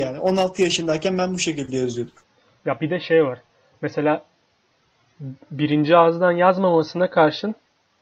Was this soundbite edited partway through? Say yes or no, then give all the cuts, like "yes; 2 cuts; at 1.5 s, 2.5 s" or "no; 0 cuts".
no; 0 cuts